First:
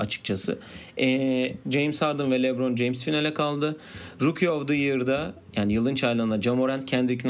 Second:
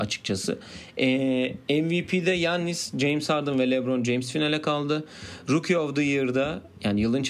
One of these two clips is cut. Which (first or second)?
first